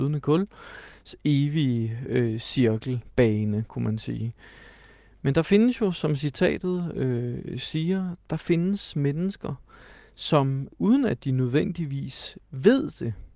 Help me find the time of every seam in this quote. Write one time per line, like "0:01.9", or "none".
none